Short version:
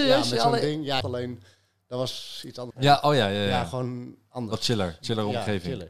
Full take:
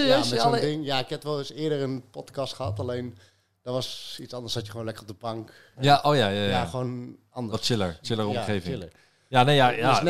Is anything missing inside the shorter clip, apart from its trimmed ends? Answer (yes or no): yes